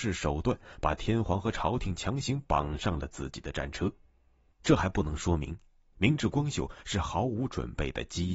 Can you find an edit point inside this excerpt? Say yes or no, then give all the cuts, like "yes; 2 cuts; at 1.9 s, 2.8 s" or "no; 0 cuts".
yes; 1 cut; at 4.5 s